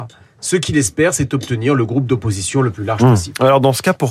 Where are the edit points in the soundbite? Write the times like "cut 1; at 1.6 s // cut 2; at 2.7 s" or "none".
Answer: none